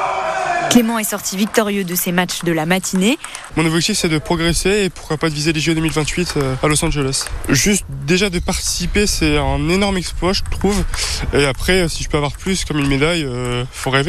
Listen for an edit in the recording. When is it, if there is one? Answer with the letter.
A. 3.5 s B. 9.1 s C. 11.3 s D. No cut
A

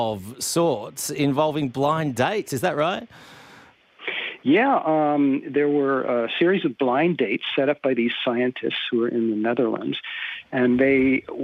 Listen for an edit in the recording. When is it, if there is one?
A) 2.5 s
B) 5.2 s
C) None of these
C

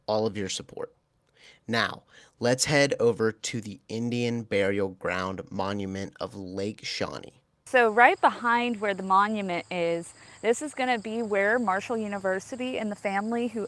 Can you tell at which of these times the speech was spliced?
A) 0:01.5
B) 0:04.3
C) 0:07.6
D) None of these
D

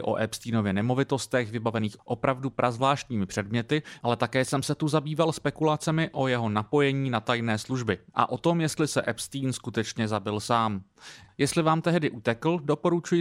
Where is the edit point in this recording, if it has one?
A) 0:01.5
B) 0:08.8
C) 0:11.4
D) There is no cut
D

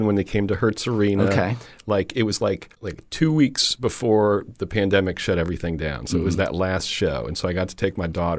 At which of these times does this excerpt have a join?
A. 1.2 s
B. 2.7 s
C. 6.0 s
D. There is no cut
B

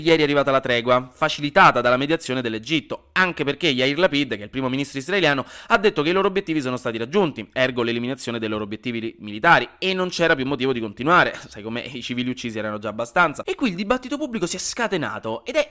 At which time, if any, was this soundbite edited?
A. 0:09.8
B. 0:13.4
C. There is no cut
B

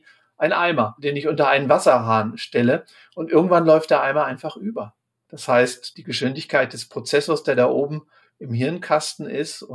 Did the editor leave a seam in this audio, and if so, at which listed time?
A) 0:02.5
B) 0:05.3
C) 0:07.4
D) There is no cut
B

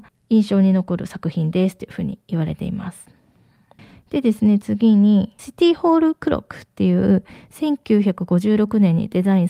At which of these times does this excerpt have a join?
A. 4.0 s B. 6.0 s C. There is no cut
C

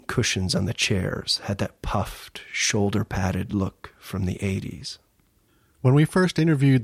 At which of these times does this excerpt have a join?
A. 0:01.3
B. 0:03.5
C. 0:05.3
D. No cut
D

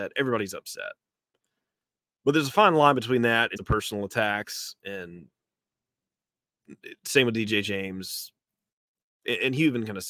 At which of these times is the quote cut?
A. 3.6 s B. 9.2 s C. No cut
A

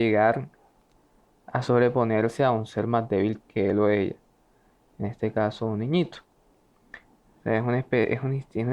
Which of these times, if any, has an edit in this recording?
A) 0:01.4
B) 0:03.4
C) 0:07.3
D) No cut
B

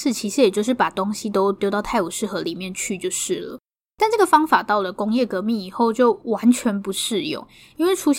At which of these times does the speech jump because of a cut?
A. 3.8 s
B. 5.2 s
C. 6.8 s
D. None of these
D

